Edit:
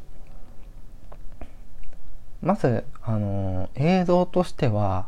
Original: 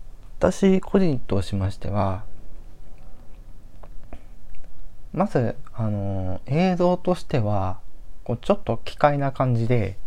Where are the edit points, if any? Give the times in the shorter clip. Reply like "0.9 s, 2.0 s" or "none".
none